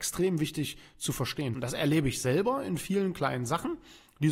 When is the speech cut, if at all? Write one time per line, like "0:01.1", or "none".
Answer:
0:01.5